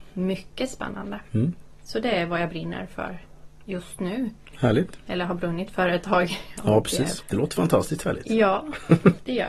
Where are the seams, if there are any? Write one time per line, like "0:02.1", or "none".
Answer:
0:07.2

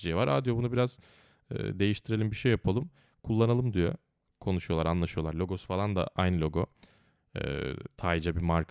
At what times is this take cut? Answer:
none

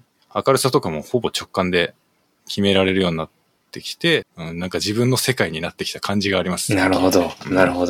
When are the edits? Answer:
0:04.2

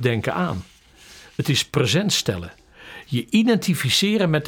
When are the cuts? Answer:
none

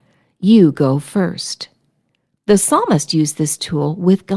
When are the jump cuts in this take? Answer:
none

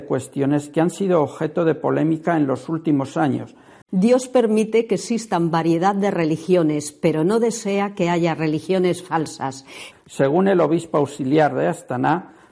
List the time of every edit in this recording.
0:03.8
0:09.9

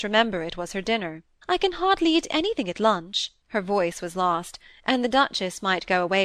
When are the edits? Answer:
0:01.4
0:03.4

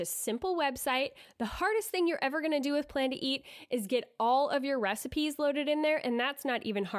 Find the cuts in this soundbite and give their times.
none

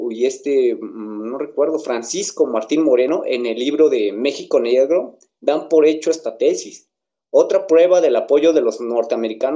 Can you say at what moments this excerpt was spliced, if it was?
none

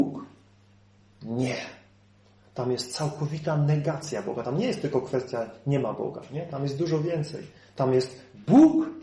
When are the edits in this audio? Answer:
none

